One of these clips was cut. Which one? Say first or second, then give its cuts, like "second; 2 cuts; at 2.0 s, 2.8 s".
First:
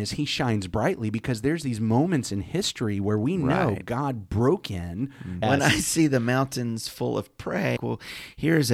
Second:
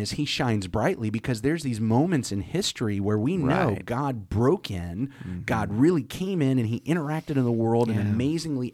first; 2 cuts; at 5.4 s, 7.8 s